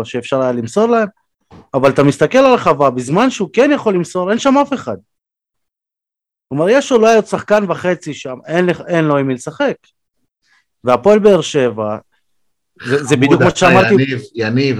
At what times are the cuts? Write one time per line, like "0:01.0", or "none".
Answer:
none